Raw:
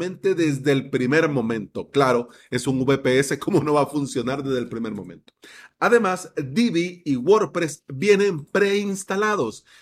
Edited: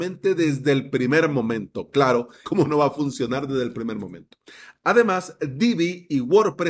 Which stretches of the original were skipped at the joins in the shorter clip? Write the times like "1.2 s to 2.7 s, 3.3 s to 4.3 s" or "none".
2.4 s to 3.4 s